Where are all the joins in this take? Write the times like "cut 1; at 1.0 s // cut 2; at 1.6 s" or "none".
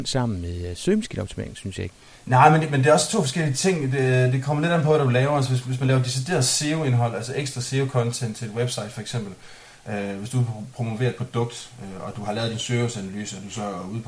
none